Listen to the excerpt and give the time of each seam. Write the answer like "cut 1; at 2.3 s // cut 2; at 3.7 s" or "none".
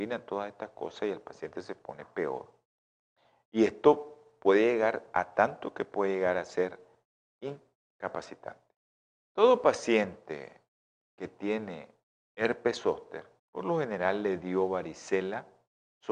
cut 1; at 9.2 s // cut 2; at 13.4 s